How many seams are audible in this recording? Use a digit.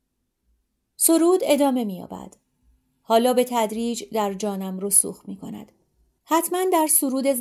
1